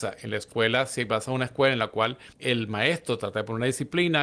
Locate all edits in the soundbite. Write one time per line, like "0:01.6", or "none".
0:02.3